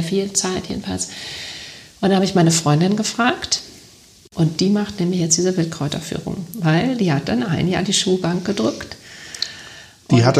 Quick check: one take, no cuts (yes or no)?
yes